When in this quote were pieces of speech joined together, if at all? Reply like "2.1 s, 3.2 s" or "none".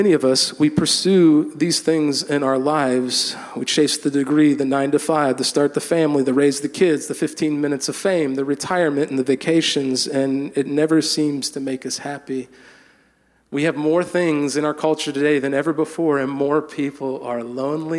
none